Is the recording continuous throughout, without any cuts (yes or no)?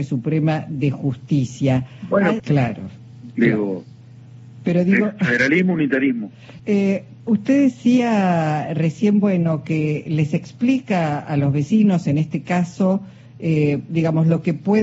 no